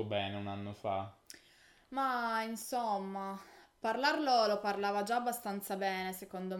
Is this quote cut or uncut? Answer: uncut